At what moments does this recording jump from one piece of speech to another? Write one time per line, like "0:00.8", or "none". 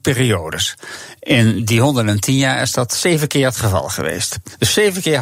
none